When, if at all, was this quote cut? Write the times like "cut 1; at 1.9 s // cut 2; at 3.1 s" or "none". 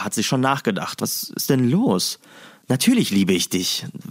cut 1; at 1.0 s